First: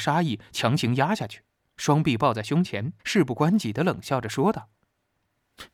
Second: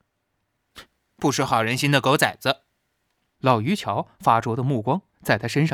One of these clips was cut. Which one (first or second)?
first